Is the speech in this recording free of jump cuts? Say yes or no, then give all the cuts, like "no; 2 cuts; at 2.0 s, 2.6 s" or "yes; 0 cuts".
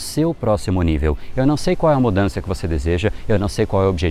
no; 1 cut; at 1.3 s